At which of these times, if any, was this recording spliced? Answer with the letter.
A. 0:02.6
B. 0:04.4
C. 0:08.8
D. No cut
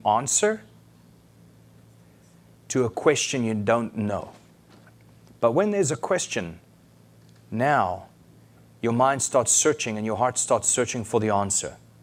D